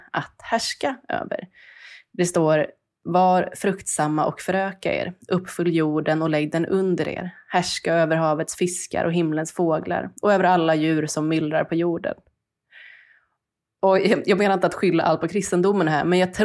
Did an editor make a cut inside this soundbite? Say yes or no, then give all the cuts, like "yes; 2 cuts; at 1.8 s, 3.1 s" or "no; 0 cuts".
no; 0 cuts